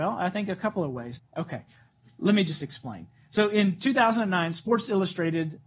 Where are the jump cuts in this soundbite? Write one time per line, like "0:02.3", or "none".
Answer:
0:01.2